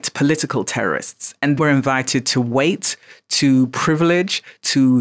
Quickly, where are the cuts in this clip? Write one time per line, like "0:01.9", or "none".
0:01.6